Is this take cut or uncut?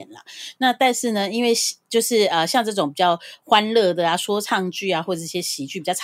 uncut